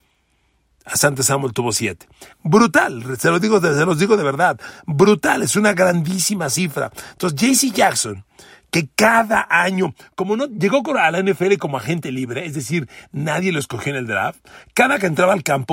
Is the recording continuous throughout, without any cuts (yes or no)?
no